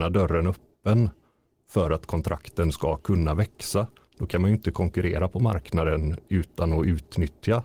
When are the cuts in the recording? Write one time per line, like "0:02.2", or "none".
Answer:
none